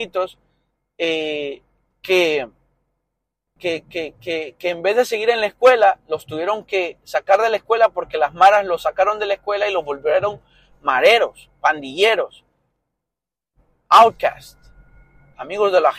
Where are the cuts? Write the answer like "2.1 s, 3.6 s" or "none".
3.6 s